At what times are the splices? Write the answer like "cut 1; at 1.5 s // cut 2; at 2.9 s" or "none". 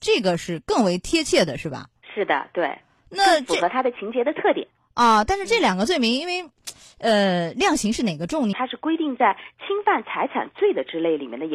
cut 1; at 8.5 s

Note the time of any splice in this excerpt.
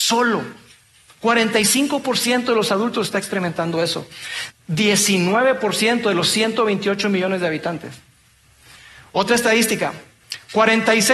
cut 1; at 4.5 s

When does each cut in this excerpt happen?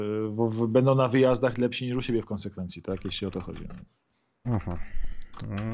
none

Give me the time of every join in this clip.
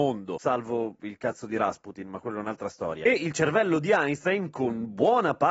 none

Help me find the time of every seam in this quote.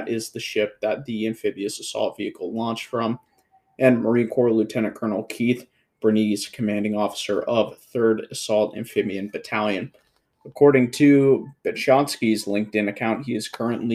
none

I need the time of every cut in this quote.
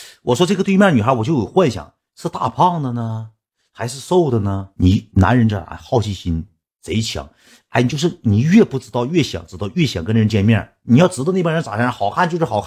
cut 1; at 4.7 s

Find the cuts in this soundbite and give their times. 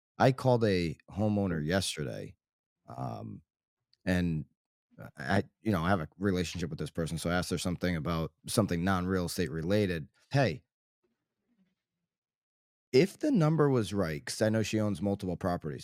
cut 1; at 8.4 s // cut 2; at 10.3 s

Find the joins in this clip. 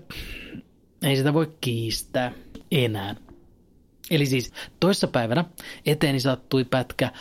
none

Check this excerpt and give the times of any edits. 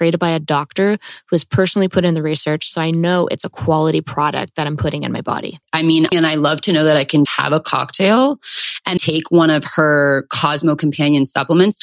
cut 1; at 6.1 s // cut 2; at 7.2 s // cut 3; at 9.0 s

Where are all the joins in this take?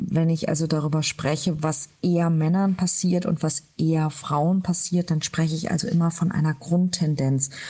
none

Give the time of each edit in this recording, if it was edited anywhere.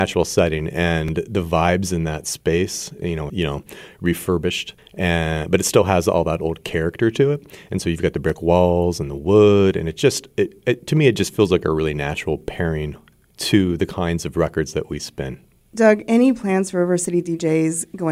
cut 1; at 3.3 s

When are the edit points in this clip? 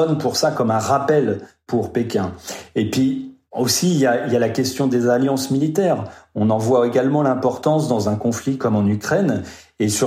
none

